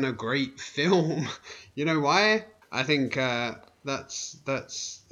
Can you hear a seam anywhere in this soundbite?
yes; 1 cut; at 2.6 s

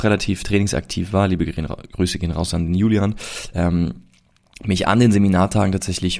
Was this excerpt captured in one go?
yes; 0 cuts

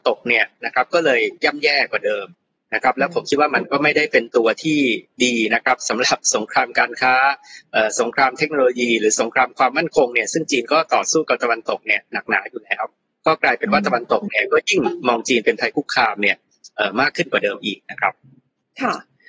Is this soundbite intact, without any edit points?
yes; 0 cuts

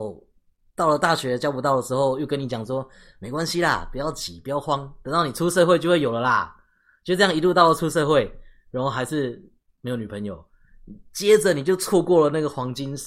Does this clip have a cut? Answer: no; 0 cuts

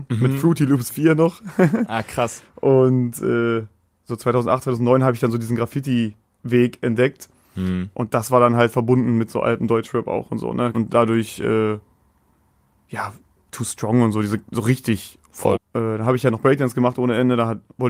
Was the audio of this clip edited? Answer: yes; 2 cuts; at 10.7 s, 15.5 s

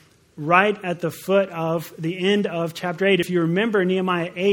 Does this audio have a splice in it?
no; 0 cuts

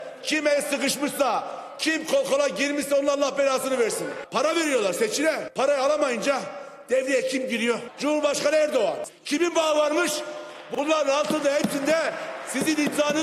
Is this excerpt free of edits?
no; 2 cuts; at 1.8 s, 9.1 s

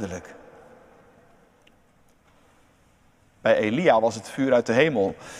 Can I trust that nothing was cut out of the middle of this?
yes; 0 cuts

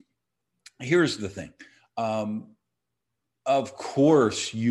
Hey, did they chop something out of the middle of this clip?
no; 0 cuts

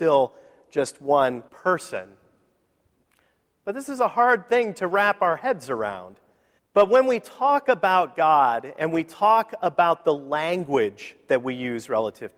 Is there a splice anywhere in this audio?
yes; 2 cuts; at 1.5 s, 6.6 s

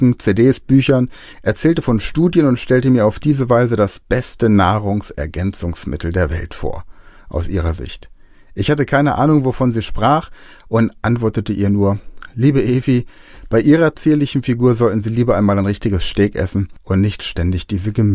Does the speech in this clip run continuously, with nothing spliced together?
yes; 0 cuts

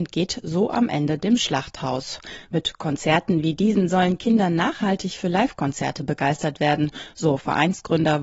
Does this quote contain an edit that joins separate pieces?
no; 0 cuts

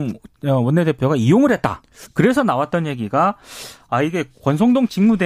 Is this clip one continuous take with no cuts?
no; 1 cut; at 2.0 s

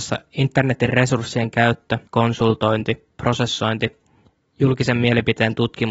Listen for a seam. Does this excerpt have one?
yes; 1 cut; at 2.1 s

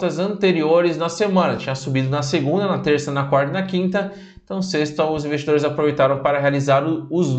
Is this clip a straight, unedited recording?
yes; 0 cuts

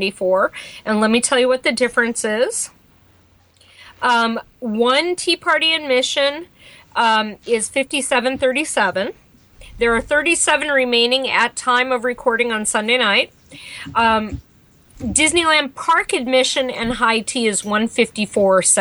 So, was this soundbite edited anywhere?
no; 0 cuts

